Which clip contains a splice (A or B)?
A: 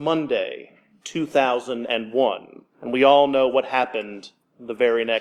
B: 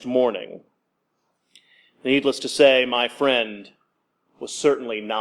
A